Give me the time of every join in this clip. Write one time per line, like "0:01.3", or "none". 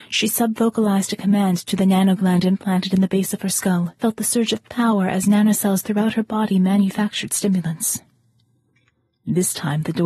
0:04.0